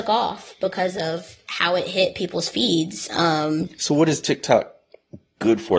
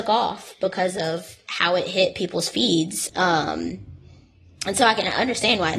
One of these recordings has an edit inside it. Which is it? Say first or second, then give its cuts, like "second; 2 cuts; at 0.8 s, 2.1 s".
second; 1 cut; at 3.1 s